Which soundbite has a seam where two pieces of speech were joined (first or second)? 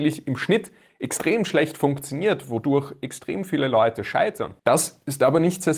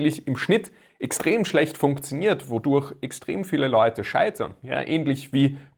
first